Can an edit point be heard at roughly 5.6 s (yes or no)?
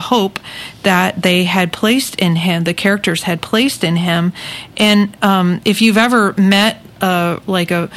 no